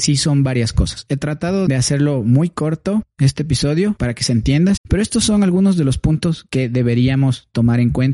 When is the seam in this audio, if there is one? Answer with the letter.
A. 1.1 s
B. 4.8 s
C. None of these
B